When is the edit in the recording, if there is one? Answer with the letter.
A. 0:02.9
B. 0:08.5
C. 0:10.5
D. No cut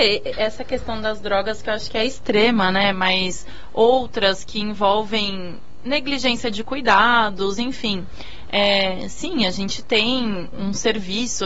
C